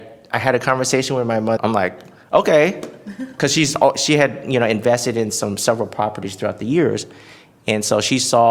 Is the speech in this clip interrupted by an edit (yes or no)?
yes